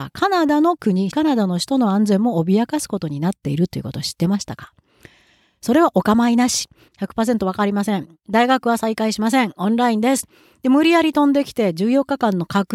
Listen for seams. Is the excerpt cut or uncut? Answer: cut